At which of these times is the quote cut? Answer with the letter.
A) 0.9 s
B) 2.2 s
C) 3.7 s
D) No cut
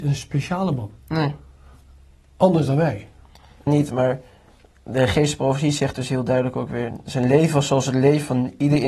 C